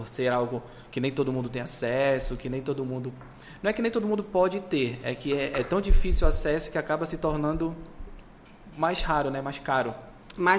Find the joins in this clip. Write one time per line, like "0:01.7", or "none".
none

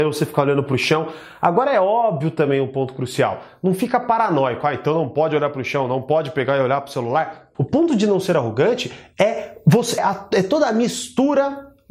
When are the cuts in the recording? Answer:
0:07.5
0:10.0

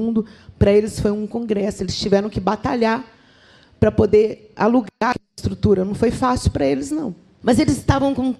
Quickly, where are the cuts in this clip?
0:07.4

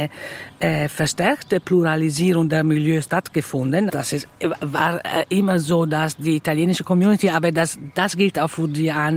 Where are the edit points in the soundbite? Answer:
0:03.9

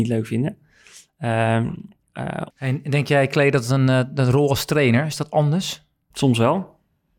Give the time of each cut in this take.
0:02.5
0:06.1

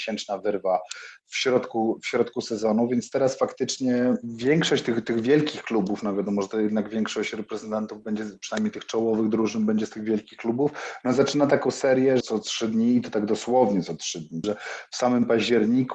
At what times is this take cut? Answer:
0:12.2
0:14.4

